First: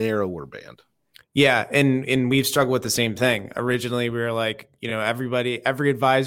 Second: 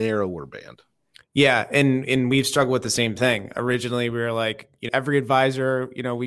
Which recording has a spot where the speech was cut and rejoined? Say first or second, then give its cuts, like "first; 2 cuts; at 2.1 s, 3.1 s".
second; 1 cut; at 4.9 s